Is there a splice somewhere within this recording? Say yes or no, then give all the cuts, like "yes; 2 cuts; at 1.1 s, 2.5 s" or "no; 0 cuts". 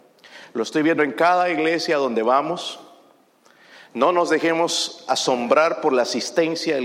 no; 0 cuts